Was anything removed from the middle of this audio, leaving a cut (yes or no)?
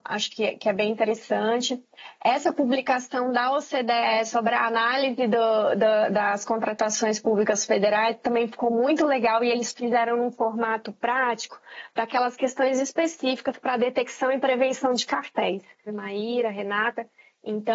yes